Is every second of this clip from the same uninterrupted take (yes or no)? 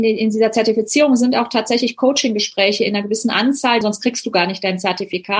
no